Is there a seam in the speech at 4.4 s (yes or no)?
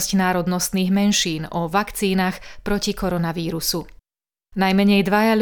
yes